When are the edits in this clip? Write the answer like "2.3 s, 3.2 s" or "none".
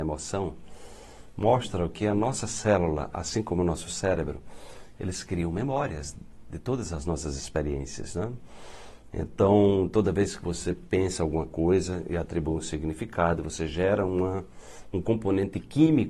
none